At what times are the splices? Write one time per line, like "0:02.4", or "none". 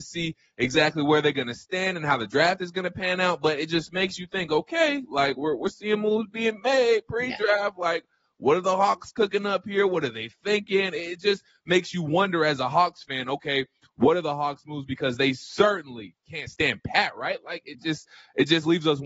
none